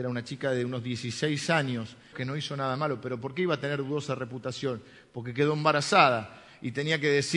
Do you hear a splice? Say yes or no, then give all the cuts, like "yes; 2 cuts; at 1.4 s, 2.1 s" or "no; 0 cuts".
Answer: yes; 1 cut; at 2.1 s